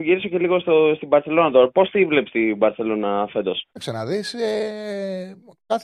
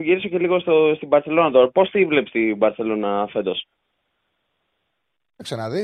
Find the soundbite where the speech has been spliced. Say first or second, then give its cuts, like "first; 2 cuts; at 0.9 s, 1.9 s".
first; 1 cut; at 3.7 s